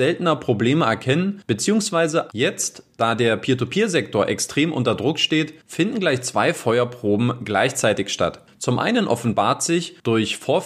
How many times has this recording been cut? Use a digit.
1